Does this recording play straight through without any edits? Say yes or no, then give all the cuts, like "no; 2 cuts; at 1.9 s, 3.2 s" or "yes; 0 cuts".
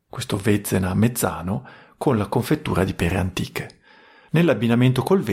no; 1 cut; at 4.3 s